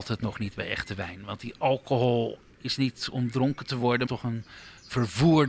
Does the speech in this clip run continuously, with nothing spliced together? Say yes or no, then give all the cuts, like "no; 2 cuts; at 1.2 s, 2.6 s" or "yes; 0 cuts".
no; 1 cut; at 4.1 s